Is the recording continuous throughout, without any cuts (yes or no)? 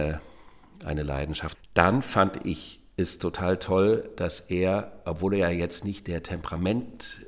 no